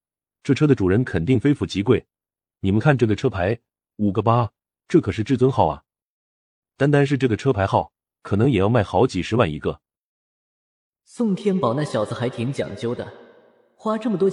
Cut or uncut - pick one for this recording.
uncut